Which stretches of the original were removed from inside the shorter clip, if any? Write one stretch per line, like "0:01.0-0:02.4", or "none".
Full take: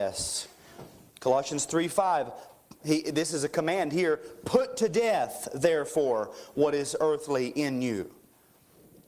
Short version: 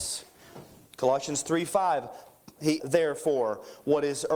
0:03.0-0:05.5